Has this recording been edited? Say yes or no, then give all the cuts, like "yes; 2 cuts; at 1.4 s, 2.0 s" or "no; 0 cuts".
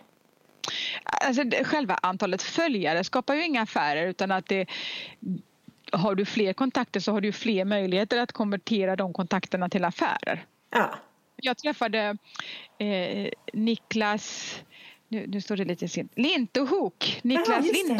no; 0 cuts